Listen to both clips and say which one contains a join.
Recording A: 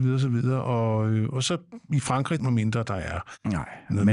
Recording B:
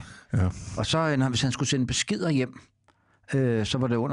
A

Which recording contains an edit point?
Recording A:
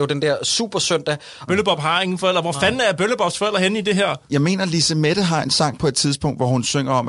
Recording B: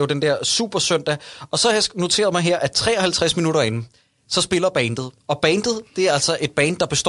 A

